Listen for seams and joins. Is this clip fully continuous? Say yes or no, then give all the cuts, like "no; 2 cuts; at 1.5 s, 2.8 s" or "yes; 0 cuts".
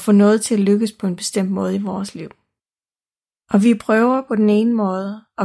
yes; 0 cuts